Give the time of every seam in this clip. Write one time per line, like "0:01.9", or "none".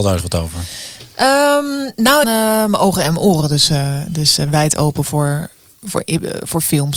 0:02.2